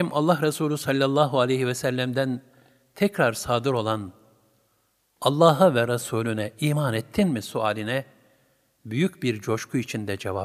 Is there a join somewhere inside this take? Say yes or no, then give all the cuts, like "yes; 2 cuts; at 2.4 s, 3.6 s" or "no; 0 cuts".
no; 0 cuts